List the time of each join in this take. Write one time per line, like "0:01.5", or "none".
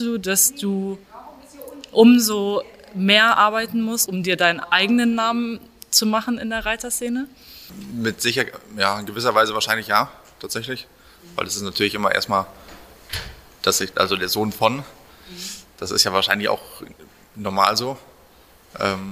0:04.1